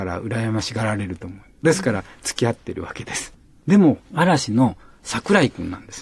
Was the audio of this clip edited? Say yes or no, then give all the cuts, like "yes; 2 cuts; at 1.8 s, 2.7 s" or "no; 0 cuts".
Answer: yes; 1 cut; at 4.0 s